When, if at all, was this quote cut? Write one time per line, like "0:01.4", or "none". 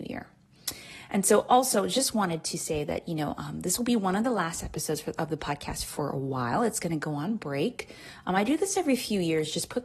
none